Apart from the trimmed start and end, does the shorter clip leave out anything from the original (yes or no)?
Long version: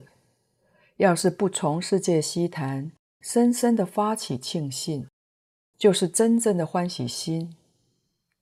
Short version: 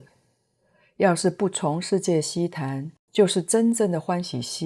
yes